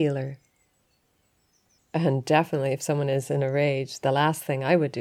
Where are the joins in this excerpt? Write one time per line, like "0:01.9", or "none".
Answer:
0:01.8